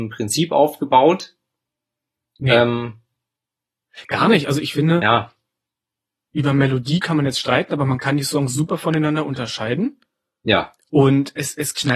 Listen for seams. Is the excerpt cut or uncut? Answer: uncut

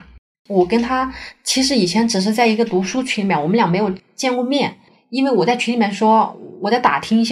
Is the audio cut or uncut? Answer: uncut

